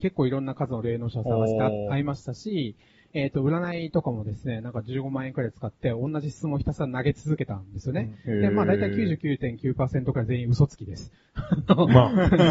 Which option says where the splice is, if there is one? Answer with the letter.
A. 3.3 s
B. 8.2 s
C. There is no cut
C